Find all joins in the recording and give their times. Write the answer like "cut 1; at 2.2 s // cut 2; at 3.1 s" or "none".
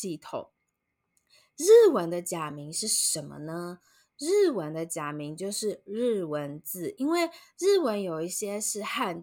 none